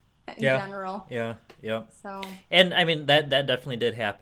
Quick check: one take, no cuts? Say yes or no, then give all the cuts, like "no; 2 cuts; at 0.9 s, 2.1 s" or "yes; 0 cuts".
yes; 0 cuts